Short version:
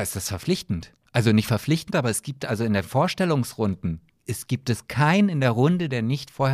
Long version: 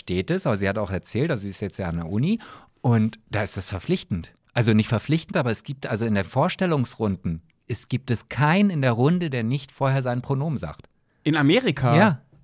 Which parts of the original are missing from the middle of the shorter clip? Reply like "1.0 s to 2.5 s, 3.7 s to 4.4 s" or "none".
none